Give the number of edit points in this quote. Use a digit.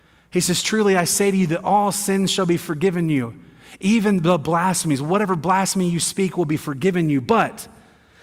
0